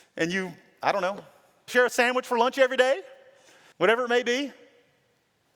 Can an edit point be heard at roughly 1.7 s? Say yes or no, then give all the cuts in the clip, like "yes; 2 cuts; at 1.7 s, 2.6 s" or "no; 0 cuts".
yes; 2 cuts; at 1.7 s, 3.7 s